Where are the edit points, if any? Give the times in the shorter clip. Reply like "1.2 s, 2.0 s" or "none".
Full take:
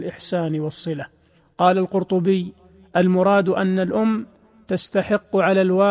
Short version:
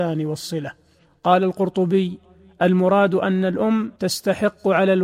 4.0 s